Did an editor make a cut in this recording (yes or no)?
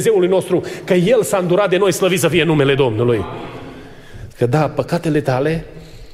yes